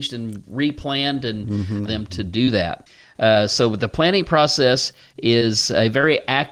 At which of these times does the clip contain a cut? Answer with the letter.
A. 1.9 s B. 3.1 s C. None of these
A